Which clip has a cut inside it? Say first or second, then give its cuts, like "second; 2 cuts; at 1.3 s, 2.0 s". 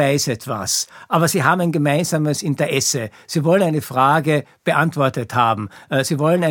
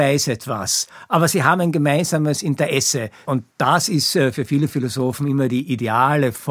second; 1 cut; at 3.2 s